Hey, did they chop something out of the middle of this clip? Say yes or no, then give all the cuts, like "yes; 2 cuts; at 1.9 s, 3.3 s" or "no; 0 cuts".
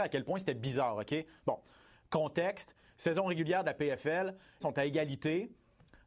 yes; 1 cut; at 4.6 s